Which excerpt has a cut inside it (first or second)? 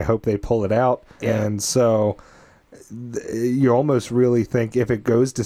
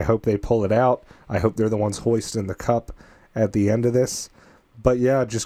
first